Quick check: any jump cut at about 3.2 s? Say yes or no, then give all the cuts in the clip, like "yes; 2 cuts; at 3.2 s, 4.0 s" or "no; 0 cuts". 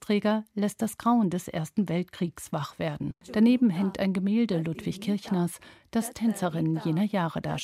yes; 1 cut; at 3.2 s